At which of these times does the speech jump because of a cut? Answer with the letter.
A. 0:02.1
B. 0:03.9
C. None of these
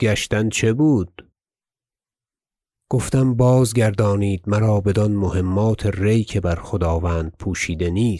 C